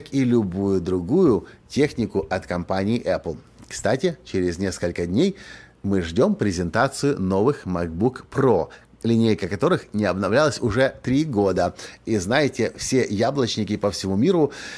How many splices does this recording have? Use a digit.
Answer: 0